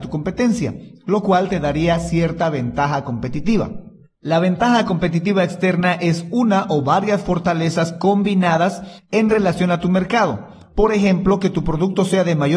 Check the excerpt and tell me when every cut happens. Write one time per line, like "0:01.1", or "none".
none